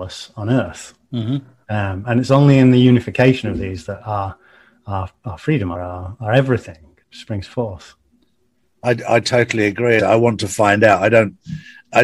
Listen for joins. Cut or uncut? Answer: cut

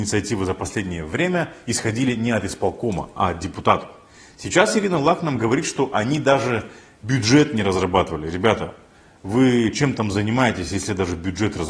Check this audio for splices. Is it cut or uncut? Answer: uncut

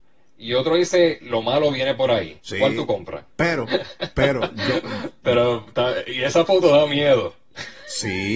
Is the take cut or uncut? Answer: cut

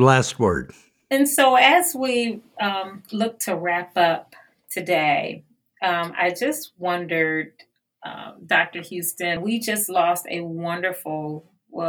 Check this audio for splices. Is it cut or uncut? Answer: cut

